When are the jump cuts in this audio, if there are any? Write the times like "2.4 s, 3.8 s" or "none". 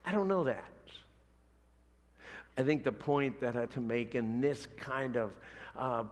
2.5 s, 3.7 s